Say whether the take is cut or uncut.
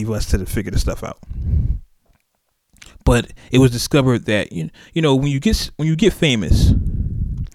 uncut